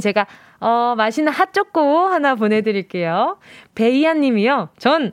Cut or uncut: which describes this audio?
uncut